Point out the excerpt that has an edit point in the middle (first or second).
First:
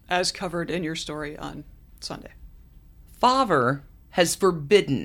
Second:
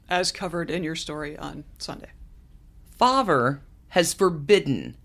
second